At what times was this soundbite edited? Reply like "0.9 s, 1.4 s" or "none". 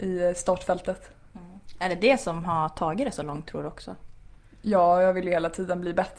none

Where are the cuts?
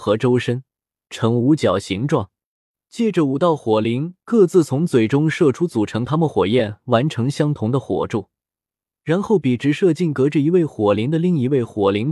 none

